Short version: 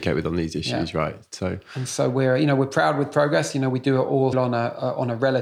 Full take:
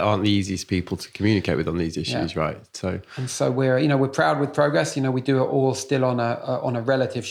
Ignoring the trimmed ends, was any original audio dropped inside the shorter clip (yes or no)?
yes